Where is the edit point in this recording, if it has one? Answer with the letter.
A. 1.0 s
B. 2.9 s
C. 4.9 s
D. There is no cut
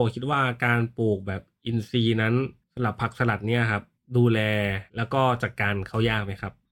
C